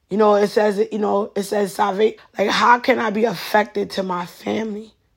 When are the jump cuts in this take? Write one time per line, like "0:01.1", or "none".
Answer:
0:02.2